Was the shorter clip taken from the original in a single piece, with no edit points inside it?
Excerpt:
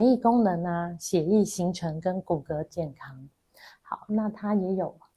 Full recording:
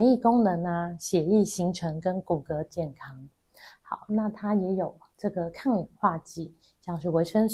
yes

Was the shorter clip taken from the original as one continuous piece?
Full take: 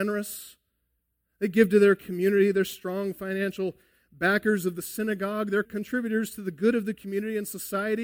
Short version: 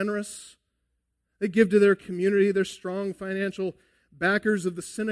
yes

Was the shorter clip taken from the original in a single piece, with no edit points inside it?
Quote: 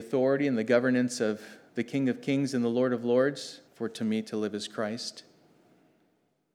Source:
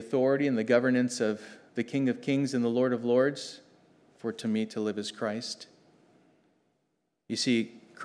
no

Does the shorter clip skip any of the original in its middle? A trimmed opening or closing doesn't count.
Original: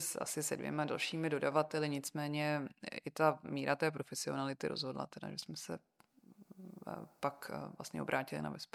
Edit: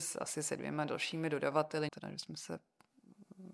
yes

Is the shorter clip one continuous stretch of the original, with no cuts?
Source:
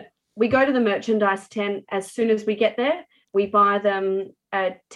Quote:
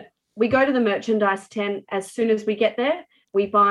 yes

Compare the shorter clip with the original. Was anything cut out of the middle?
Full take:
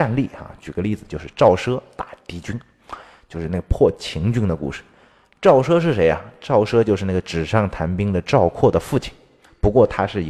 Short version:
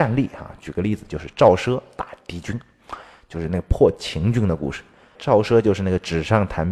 yes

